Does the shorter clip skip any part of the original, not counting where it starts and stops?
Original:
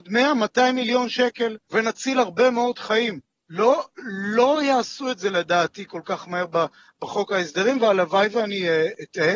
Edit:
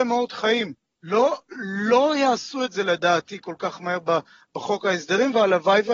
no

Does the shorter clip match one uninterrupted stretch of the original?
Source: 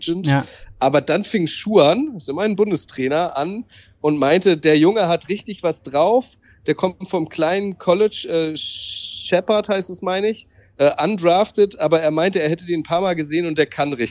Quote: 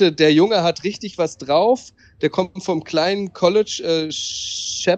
yes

